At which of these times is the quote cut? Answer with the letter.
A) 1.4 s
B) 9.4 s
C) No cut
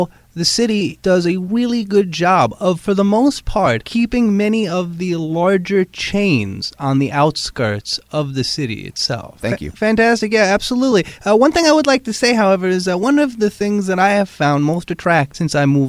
B